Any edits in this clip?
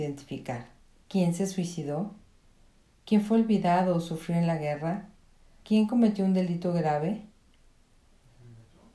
yes; 3 cuts; at 1.0 s, 2.9 s, 5.6 s

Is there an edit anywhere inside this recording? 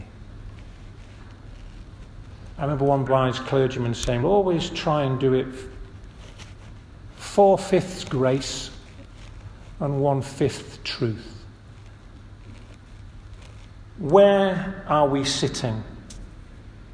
yes; 3 cuts; at 3.1 s, 4.2 s, 14.0 s

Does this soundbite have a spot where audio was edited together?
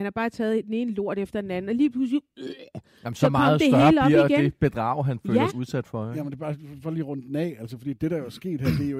yes; 1 cut; at 5.5 s

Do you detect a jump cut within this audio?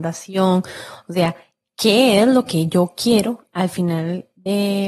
no; 0 cuts

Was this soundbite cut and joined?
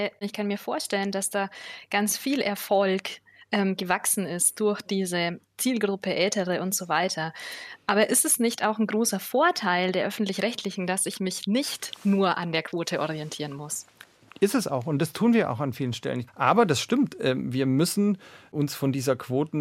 yes; 1 cut; at 16.3 s

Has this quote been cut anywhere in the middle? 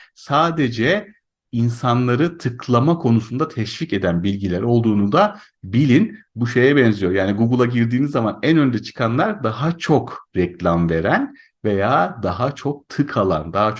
yes; 1 cut; at 6.2 s

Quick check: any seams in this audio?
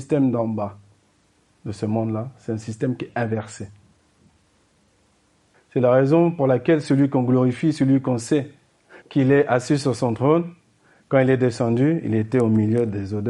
yes; 2 cuts; at 5.5 s, 9.0 s

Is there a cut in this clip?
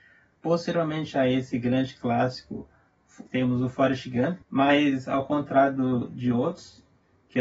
yes; 2 cuts; at 3.3 s, 4.4 s

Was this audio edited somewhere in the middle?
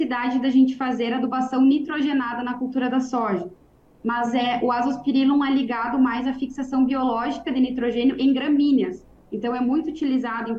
yes; 1 cut; at 4.0 s

